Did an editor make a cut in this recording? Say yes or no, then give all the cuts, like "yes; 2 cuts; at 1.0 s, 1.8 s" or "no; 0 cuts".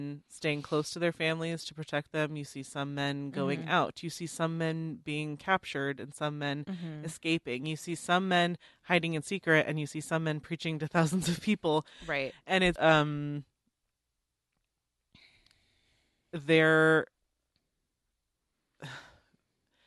yes; 1 cut; at 12.8 s